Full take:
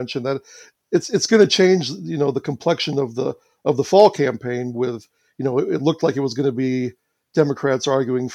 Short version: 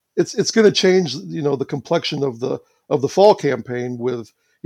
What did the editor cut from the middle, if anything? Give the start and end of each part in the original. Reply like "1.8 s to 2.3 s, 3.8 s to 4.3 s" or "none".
none